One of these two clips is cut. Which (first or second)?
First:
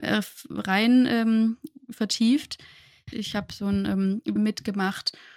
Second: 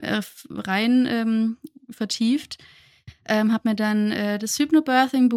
first